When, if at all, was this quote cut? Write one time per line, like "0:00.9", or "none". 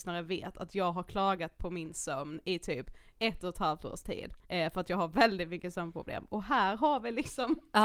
0:04.4